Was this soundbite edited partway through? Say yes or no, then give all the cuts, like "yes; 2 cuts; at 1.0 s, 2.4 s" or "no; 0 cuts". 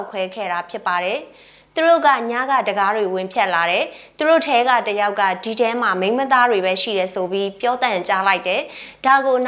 no; 0 cuts